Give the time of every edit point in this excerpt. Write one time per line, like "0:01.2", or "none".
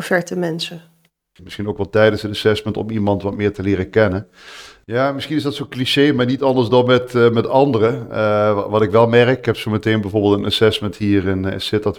0:01.4
0:04.8